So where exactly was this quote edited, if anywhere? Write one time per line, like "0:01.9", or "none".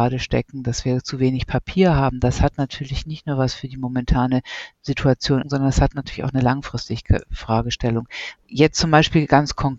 0:05.4
0:08.4